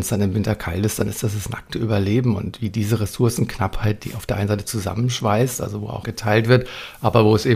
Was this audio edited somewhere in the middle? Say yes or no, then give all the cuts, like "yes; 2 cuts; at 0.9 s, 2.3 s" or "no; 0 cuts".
yes; 1 cut; at 6.0 s